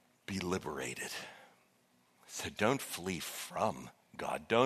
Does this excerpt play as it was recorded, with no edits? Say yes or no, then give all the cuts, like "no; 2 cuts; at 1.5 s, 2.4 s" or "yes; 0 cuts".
yes; 0 cuts